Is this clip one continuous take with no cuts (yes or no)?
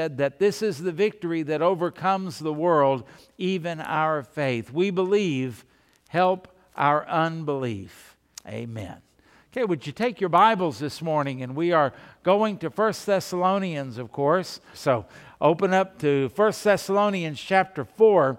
no